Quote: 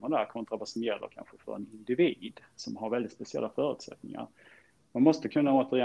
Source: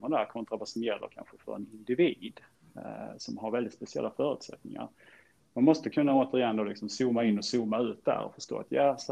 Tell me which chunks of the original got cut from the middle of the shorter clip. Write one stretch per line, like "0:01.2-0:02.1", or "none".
0:02.6-0:03.2